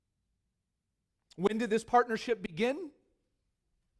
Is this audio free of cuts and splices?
yes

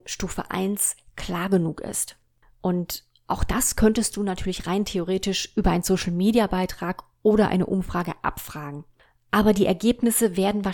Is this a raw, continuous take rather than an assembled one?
yes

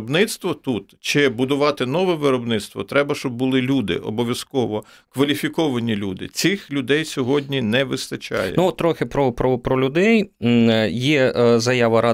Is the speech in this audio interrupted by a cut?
no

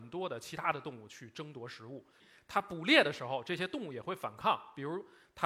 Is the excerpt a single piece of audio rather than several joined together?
yes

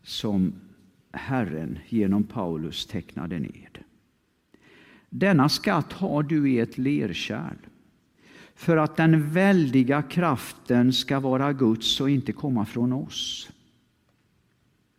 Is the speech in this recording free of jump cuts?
yes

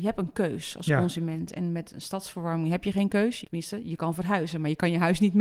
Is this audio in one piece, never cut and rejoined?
no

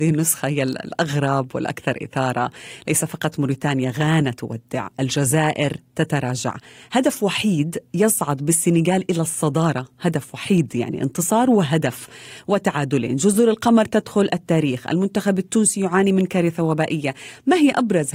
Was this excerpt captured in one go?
yes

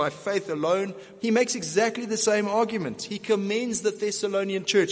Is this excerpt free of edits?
no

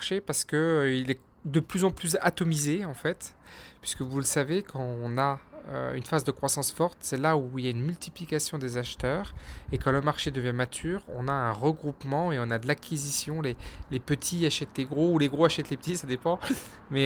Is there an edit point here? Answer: no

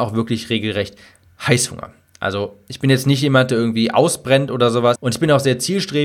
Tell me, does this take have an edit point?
yes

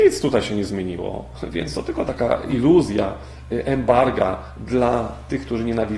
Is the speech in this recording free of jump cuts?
no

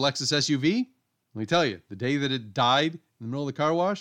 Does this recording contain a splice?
yes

